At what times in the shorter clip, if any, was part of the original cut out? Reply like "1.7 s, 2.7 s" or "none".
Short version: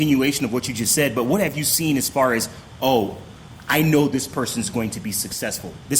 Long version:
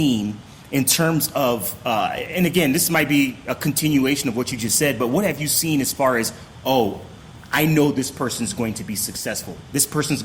none

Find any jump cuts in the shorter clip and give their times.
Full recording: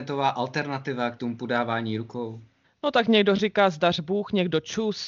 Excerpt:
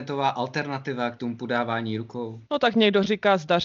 2.5 s

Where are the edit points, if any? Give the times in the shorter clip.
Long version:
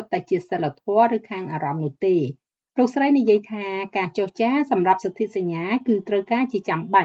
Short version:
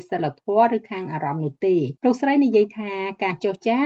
2.0 s

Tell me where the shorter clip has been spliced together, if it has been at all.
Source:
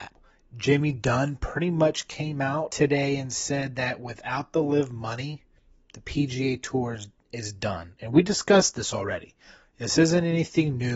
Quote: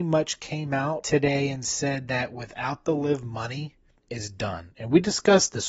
3.9 s

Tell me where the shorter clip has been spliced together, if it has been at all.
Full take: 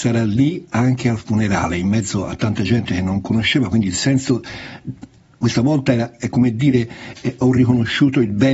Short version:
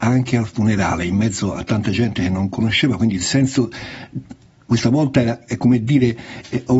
none

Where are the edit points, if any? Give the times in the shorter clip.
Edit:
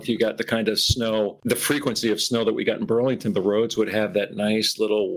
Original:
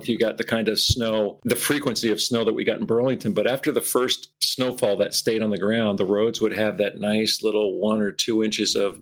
3.3 s

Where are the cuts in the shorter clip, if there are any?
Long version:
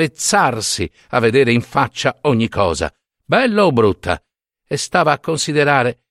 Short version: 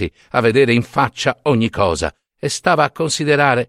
2.3 s

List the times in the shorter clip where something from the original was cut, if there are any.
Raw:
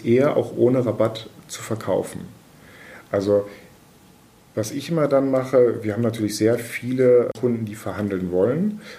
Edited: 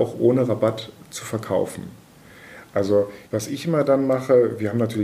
3.3 s

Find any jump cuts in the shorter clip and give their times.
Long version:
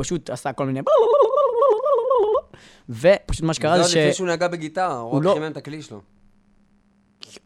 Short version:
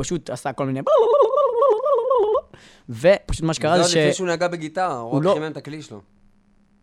none

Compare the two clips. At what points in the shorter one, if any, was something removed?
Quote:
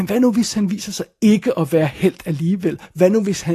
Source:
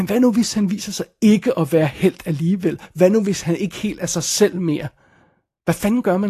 none

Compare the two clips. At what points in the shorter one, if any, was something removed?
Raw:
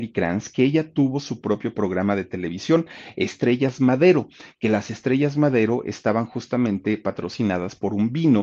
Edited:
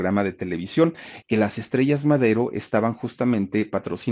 1.2 s

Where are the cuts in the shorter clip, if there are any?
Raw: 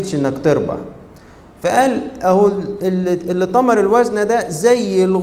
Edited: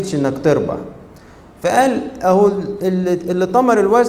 none

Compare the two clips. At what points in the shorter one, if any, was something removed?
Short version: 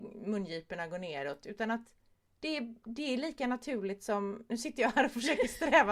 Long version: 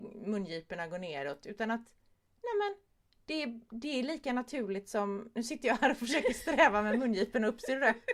2.4 s

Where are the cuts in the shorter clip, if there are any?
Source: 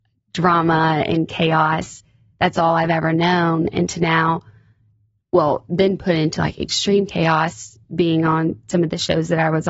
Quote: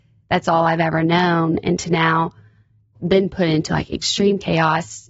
2.9 s

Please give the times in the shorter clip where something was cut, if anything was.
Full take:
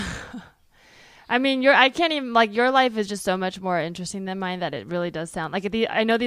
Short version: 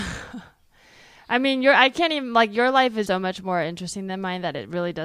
3.1 s

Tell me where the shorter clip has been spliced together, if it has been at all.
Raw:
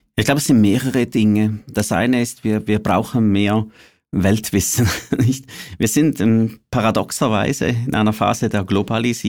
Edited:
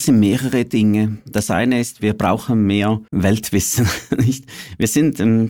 2.0 s, 3.1 s

